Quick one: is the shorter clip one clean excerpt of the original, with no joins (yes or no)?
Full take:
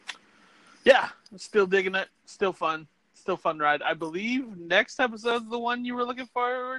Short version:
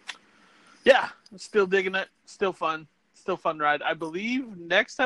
yes